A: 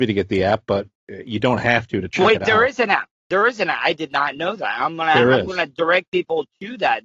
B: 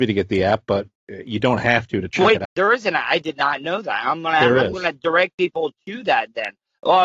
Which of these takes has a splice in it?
B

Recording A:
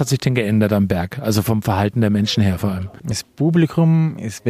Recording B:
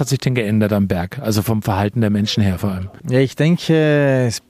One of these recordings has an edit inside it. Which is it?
A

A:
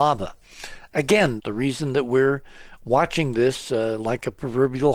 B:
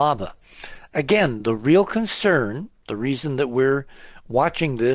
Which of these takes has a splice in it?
A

